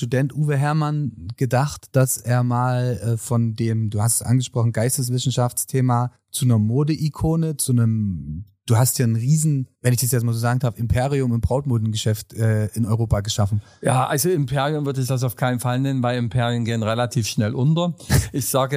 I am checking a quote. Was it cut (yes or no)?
no